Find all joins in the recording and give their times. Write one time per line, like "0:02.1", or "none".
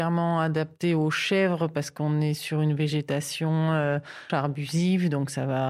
0:04.3